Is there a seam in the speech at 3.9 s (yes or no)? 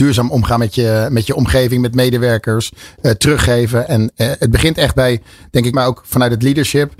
no